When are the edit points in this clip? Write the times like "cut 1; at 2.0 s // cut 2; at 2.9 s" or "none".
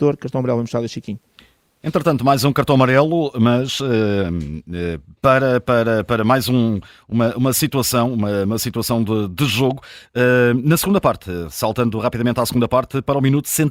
none